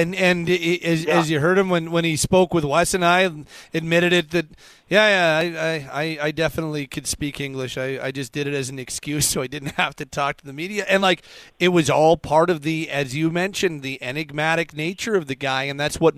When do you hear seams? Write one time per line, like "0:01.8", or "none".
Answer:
none